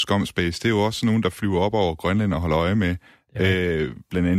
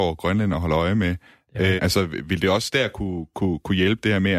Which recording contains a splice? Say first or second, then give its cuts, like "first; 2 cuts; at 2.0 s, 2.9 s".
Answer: second; 1 cut; at 1.8 s